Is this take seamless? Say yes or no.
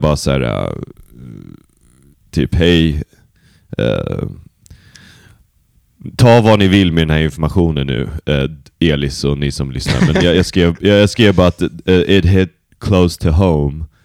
yes